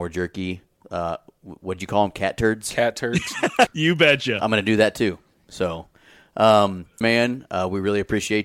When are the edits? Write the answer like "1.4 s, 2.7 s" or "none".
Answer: 3.7 s, 7.0 s